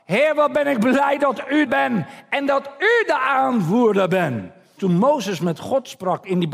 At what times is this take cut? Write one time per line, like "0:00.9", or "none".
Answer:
0:01.7
0:04.8